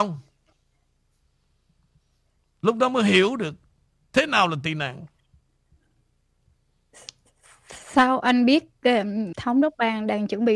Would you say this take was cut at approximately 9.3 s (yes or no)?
yes